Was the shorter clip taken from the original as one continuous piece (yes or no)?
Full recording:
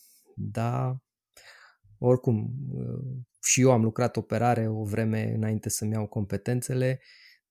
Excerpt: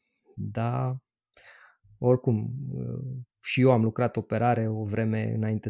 yes